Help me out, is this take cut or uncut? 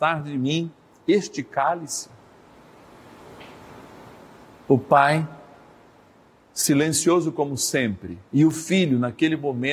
cut